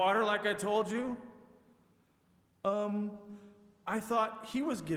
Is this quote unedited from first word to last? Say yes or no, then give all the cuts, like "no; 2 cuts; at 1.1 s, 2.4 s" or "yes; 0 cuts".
yes; 0 cuts